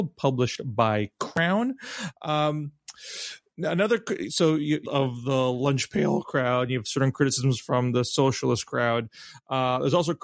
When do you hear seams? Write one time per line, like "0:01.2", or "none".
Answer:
0:04.8